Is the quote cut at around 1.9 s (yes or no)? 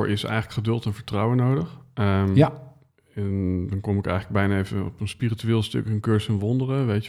no